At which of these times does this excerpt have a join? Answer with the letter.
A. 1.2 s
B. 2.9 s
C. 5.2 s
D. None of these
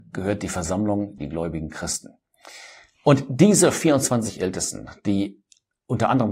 A